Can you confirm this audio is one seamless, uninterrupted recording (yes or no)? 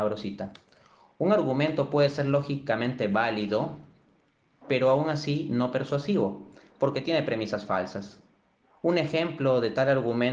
yes